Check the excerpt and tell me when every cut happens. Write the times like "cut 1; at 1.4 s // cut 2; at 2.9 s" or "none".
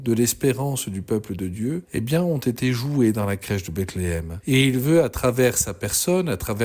cut 1; at 4.4 s